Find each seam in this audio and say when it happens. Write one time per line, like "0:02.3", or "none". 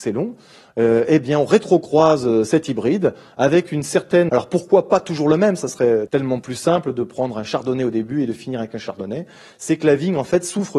0:04.3
0:06.1